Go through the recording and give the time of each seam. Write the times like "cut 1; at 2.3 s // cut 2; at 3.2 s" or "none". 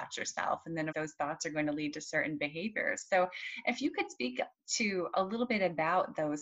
cut 1; at 0.9 s